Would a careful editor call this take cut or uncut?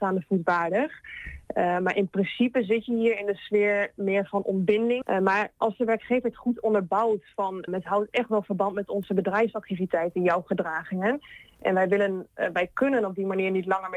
cut